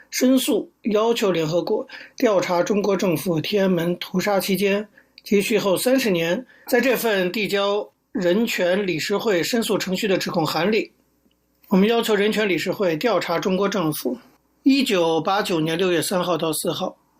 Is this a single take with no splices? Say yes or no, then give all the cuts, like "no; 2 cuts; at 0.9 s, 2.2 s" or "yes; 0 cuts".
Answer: no; 1 cut; at 6.7 s